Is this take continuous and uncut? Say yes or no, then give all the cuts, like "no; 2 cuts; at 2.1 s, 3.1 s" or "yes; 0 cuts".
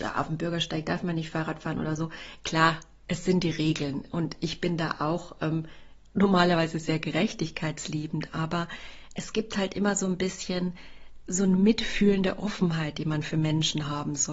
yes; 0 cuts